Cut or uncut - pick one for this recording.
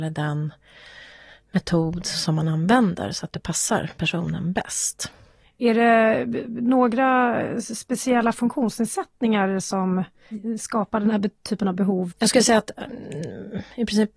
cut